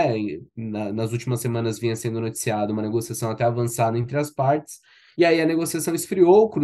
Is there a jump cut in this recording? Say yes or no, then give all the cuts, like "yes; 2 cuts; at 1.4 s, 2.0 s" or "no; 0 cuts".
no; 0 cuts